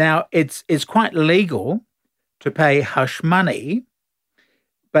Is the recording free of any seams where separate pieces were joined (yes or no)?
yes